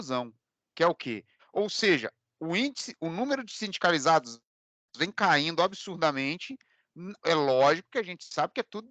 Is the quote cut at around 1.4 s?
yes; 2 cuts; at 1.4 s, 7.2 s

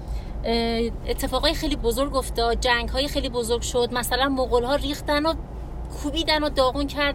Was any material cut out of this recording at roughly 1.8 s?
yes; 1 cut; at 1.8 s

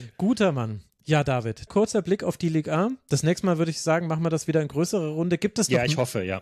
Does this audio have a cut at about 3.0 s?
no; 1 cut; at 1.7 s

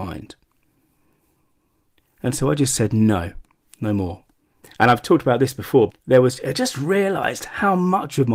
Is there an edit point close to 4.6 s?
yes; 2 cuts; at 4.6 s, 5.9 s

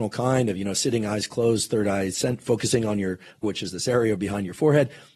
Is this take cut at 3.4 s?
yes; 1 cut; at 3.4 s

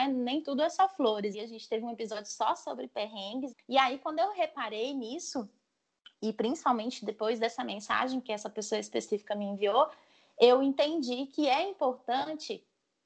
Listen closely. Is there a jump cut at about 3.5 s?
yes; 2 cuts; at 1.3 s, 3.5 s

